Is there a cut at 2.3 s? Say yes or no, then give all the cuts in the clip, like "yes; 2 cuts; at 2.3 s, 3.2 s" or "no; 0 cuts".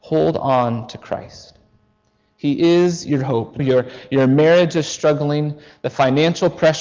no; 1 cut; at 3.6 s